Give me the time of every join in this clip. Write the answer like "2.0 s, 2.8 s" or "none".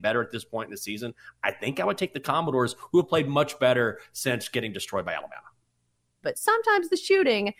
6.2 s